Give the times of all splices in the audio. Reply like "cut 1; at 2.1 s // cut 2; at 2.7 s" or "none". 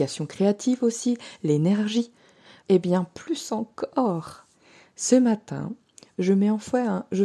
cut 1; at 2.6 s

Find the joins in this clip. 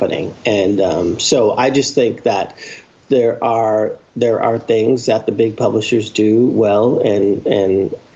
none

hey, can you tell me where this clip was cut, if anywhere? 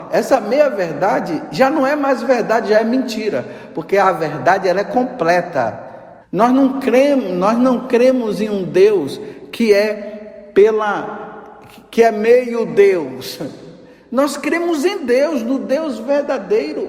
cut 1; at 6.2 s

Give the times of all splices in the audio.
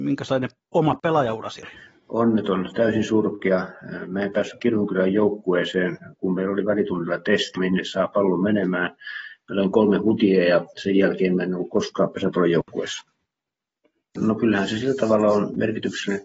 cut 1; at 7.6 s // cut 2; at 14.2 s

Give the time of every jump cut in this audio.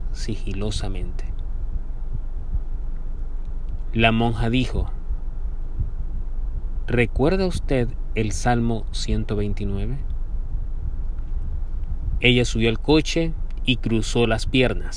cut 1; at 6.8 s // cut 2; at 12.2 s

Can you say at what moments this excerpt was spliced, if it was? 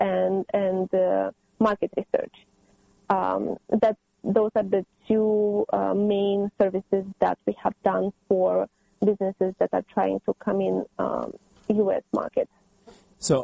none

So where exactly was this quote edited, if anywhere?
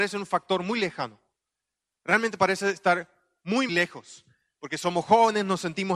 cut 1; at 3.7 s

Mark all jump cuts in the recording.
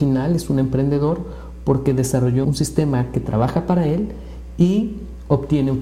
cut 1; at 2.4 s

